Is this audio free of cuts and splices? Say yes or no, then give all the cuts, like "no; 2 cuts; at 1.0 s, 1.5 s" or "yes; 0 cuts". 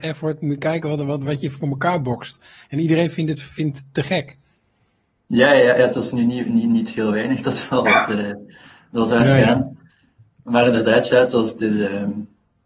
yes; 0 cuts